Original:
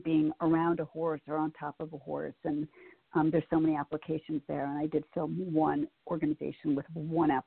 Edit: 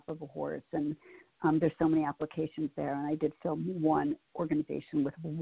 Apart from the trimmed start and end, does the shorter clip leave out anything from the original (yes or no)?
no